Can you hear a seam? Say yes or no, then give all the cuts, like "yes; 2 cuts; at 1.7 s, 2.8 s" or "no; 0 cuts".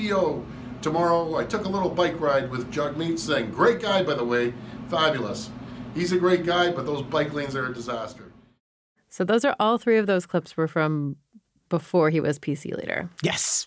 no; 0 cuts